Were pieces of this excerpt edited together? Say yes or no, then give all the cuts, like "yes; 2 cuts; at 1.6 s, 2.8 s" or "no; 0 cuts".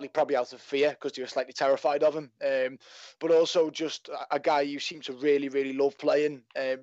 no; 0 cuts